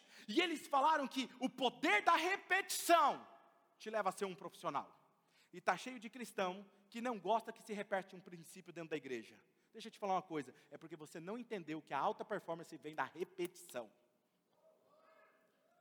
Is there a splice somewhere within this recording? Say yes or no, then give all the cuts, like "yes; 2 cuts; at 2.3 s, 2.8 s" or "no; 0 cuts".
no; 0 cuts